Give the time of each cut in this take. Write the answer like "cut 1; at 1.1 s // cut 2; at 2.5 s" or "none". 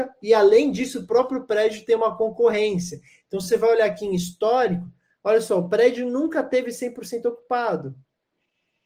none